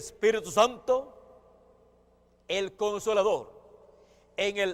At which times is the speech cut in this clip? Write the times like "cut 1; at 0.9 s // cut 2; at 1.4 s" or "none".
none